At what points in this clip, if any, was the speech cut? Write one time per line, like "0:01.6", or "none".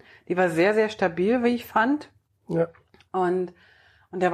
none